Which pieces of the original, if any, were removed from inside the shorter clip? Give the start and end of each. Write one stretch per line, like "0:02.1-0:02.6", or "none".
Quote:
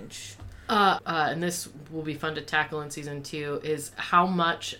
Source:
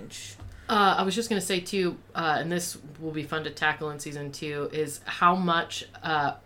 0:01.0-0:02.0

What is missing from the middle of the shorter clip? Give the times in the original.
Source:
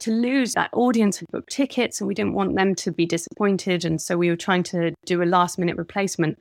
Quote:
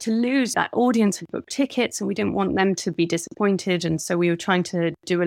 none

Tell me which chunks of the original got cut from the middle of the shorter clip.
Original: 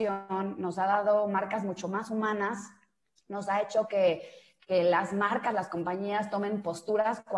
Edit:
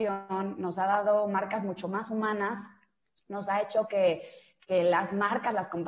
none

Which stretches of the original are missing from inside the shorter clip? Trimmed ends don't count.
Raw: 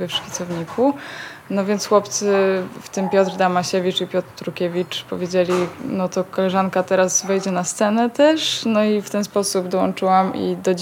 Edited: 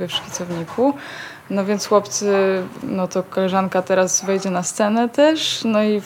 0:02.8-0:05.8

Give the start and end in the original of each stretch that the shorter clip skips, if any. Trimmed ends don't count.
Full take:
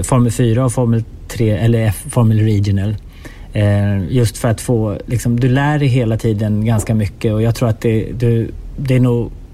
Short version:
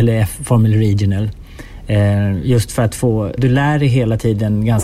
0:05.0-0:05.4

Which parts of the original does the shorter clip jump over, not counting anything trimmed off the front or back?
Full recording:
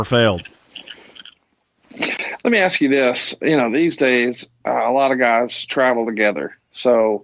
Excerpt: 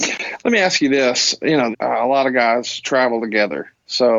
0:03.7-0:04.6

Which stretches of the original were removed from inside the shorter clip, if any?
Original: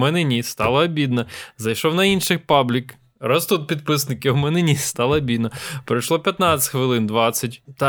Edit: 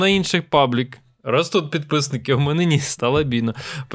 none

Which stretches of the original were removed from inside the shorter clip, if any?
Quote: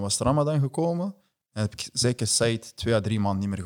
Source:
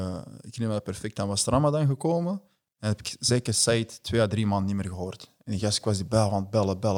none

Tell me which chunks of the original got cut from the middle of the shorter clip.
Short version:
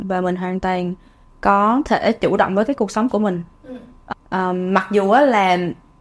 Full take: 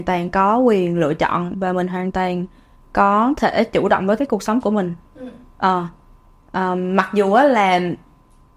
0:05.6-0:06.3

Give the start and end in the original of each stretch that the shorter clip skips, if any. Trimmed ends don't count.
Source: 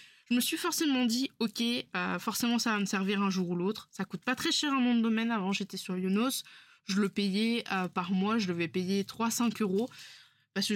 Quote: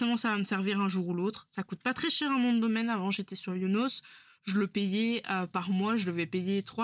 none

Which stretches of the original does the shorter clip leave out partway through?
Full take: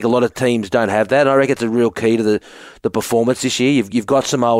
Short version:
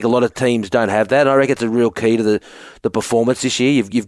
none

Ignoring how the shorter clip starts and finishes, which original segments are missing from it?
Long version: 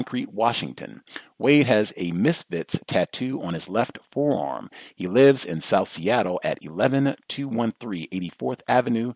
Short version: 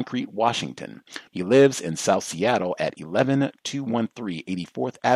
0:01.3-0:04.9

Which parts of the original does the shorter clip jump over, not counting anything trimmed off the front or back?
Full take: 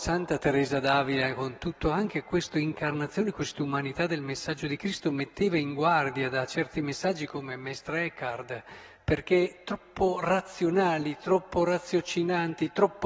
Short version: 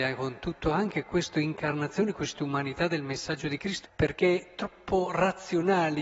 0:05.0-0:08.9

